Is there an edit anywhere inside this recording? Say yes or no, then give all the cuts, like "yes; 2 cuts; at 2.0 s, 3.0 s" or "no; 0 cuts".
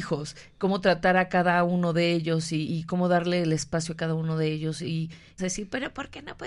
yes; 2 cuts; at 2.6 s, 5.4 s